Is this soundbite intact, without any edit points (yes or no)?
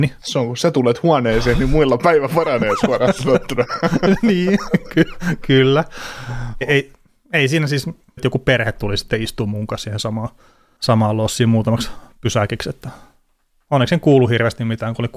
no